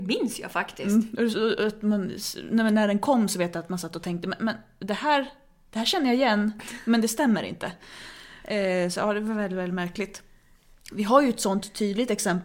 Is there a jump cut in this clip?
no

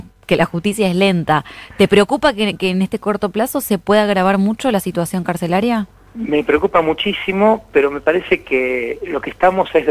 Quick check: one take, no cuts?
yes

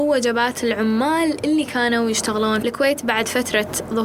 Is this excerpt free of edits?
no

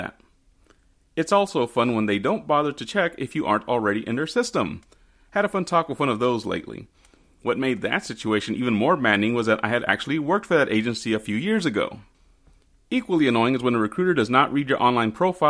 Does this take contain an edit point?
no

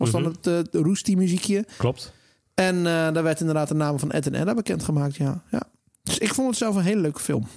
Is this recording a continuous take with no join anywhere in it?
yes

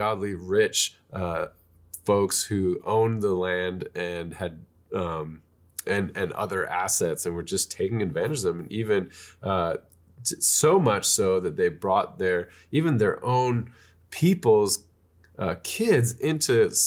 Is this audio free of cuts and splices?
yes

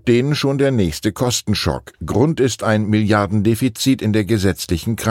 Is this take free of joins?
yes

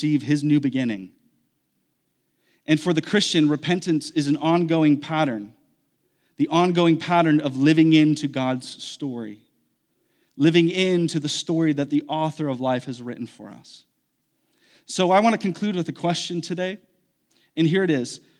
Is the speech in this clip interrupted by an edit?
no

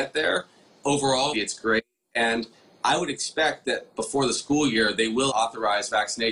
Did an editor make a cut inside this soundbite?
yes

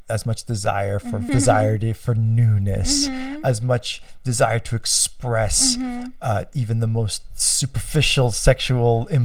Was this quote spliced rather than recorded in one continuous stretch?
yes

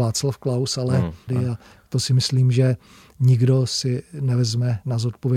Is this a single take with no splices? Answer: no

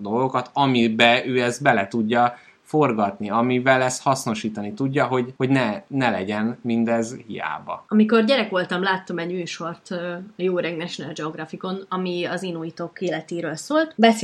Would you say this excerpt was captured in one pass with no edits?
yes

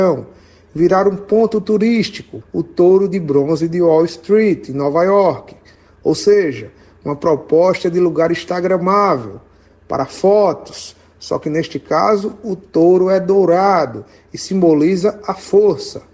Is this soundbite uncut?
no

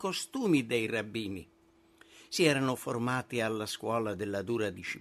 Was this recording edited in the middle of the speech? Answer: no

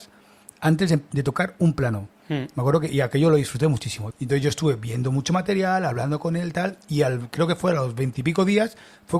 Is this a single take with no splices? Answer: no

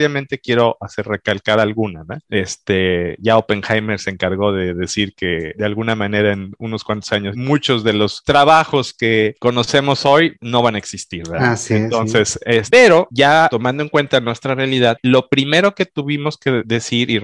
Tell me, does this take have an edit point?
yes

